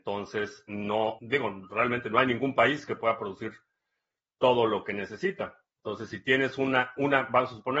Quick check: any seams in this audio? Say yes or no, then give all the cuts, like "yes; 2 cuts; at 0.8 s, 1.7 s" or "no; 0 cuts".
yes; 2 cuts; at 1.2 s, 5.7 s